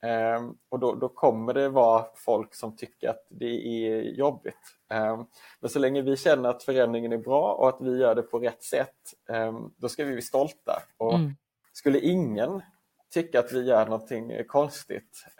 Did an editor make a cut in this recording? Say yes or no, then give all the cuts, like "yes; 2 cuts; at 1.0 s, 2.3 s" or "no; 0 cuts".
no; 0 cuts